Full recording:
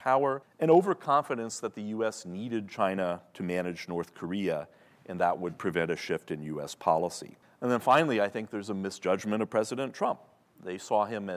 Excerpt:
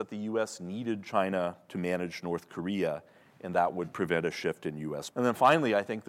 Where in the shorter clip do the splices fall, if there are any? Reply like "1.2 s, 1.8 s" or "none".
5.1 s